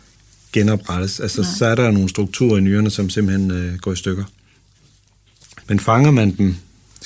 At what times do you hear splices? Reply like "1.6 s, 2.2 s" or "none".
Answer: 5.6 s

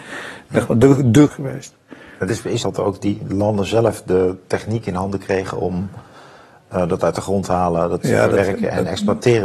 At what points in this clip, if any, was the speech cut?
1.3 s, 2.6 s

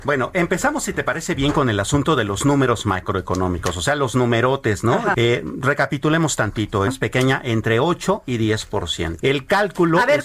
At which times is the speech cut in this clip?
5.1 s, 6.9 s, 9.2 s

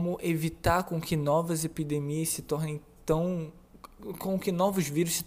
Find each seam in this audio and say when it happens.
none

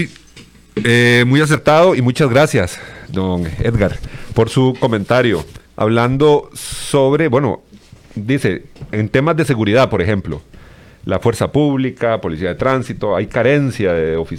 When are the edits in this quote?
5.7 s

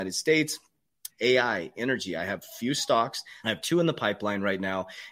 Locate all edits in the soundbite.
1.1 s, 3.4 s

